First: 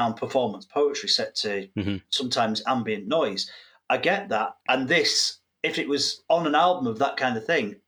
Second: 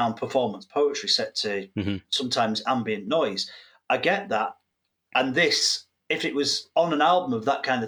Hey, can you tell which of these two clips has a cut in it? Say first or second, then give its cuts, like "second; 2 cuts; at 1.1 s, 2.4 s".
first; 1 cut; at 4.6 s